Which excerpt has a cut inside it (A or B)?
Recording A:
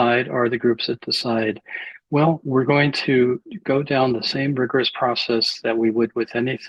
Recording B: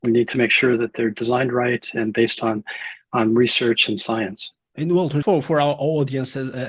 B